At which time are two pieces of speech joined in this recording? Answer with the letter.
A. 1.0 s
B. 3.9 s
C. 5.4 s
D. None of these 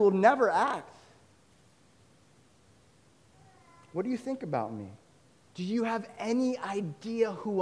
C